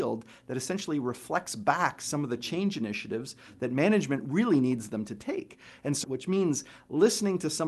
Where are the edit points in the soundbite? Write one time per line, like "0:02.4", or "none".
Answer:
0:06.0